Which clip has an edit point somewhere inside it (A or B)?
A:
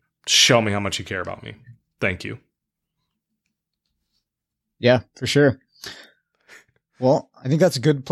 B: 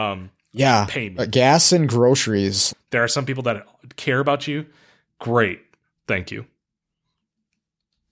B